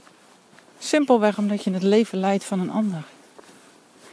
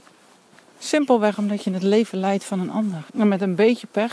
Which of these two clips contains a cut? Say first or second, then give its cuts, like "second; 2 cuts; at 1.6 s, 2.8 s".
second; 1 cut; at 3.1 s